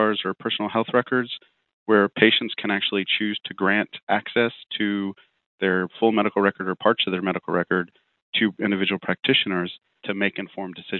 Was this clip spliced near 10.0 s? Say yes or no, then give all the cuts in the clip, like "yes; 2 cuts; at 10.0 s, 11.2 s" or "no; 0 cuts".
yes; 1 cut; at 10.0 s